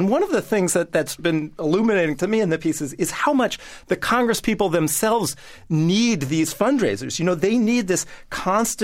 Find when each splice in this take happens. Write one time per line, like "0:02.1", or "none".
0:01.2